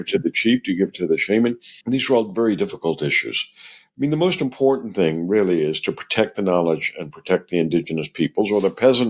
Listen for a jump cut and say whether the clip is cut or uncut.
cut